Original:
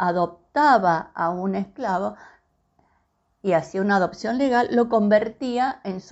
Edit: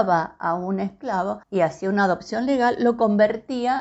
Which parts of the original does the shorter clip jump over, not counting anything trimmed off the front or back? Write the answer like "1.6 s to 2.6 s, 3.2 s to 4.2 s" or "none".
2.2 s to 3.3 s